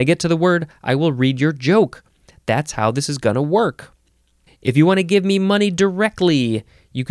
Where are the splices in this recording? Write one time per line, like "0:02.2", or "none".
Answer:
0:04.5